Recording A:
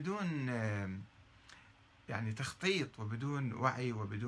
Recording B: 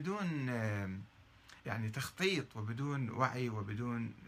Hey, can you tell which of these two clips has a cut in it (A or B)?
B